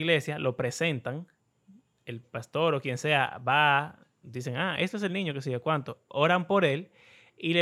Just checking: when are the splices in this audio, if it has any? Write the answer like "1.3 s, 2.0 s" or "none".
none